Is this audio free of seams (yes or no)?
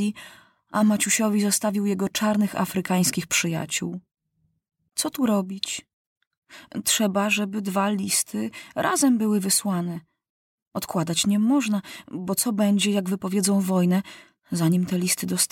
yes